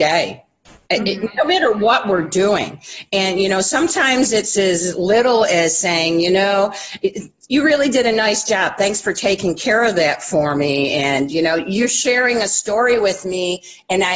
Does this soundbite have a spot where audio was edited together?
no; 0 cuts

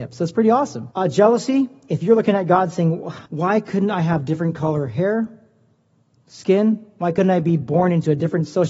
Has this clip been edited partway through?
yes; 2 cuts; at 0.9 s, 3.3 s

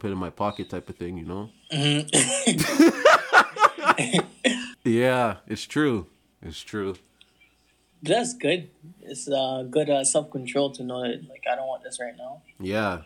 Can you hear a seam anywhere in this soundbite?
yes; 1 cut; at 4.7 s

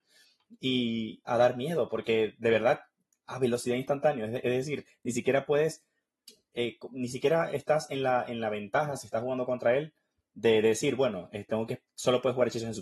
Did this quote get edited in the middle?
yes; 1 cut; at 1.3 s

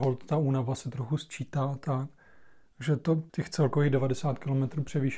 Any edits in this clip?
yes; 1 cut; at 3.3 s

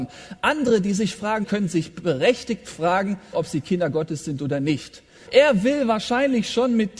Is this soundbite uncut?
no; 3 cuts; at 1.4 s, 3.3 s, 5.3 s

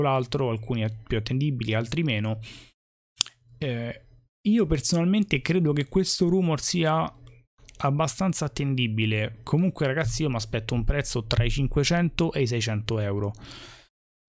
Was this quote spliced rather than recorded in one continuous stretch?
no; 0 cuts

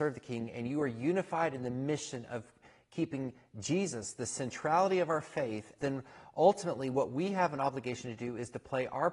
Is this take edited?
yes; 1 cut; at 5.8 s

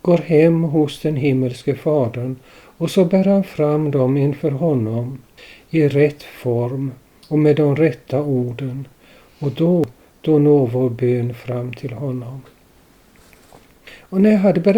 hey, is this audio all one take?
yes; 0 cuts

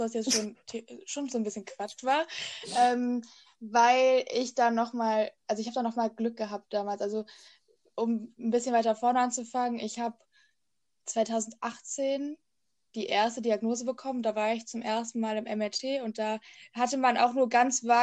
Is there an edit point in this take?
yes; 1 cut; at 12.9 s

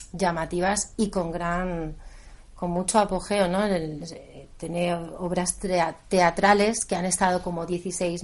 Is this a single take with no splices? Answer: yes; 0 cuts

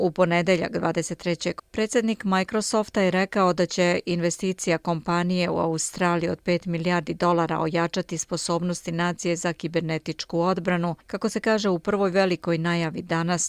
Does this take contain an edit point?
yes; 2 cuts; at 1.6 s, 11.0 s

